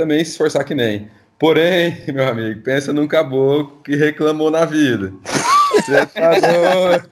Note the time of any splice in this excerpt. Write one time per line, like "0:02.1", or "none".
none